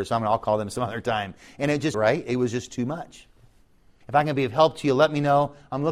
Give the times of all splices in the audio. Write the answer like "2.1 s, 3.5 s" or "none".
1.9 s, 4.0 s